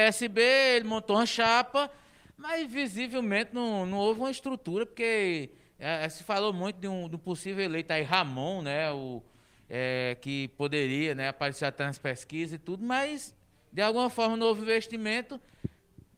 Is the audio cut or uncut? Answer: uncut